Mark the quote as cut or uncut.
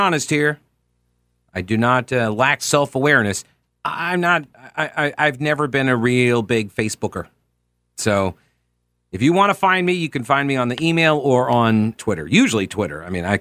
cut